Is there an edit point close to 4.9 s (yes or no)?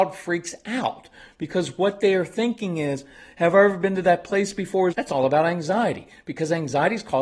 yes